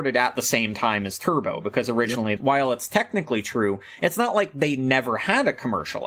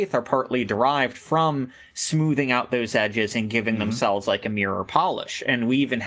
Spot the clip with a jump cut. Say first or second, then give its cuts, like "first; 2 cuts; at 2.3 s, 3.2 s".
first; 1 cut; at 2.4 s